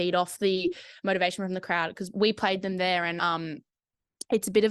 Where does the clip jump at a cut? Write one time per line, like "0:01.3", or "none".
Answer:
none